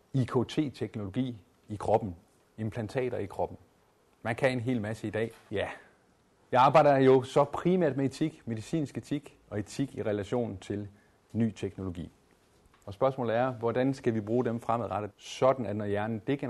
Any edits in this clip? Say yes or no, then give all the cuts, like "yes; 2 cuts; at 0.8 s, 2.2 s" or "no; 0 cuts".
yes; 3 cuts; at 5.5 s, 12.8 s, 15.1 s